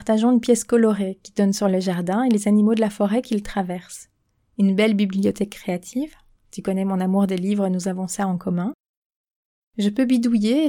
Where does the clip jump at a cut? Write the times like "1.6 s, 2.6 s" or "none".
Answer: none